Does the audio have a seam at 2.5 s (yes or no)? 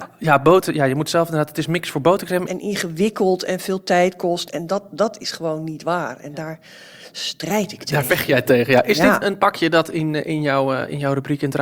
yes